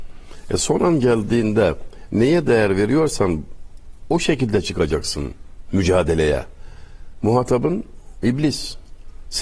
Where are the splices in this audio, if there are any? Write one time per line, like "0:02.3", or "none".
none